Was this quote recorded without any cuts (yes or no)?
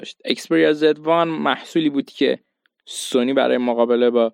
yes